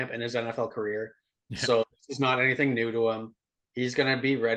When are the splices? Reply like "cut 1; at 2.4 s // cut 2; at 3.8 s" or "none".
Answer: none